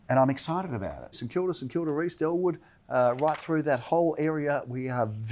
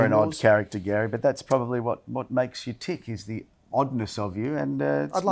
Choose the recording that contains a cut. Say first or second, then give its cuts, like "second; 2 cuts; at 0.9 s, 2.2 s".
first; 1 cut; at 1.1 s